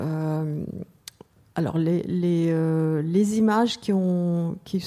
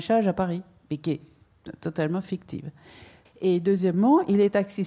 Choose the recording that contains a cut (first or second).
second